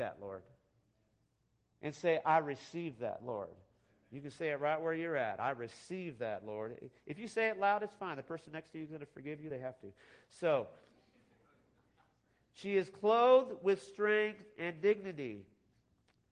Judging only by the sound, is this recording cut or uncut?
uncut